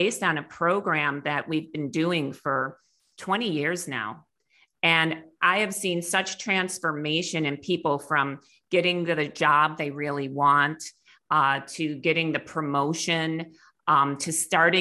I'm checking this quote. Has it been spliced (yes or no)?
no